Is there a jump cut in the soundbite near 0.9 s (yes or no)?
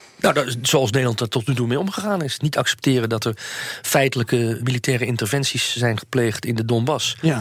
no